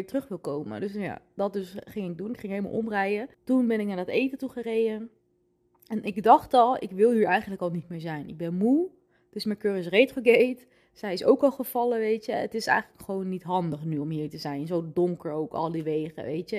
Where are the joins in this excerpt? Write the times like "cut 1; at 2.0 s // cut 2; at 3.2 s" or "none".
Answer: cut 1; at 3.3 s